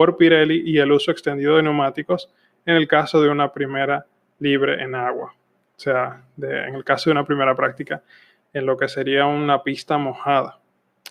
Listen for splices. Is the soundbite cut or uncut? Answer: uncut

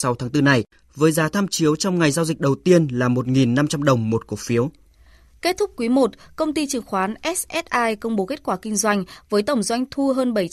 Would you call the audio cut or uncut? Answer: uncut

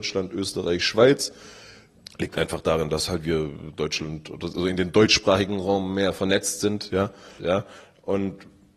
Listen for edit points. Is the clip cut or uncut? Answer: cut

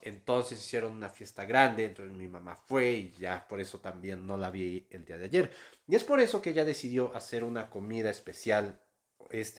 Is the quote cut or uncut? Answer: uncut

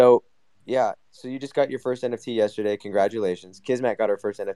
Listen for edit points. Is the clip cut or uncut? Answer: uncut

